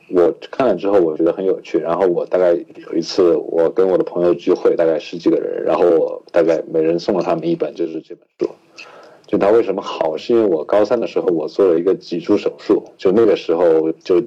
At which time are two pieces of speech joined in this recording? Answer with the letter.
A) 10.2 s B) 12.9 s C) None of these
A